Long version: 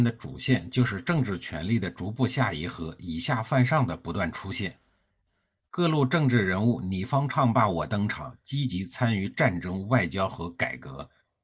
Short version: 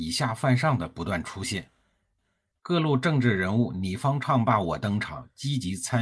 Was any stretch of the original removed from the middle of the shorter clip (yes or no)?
no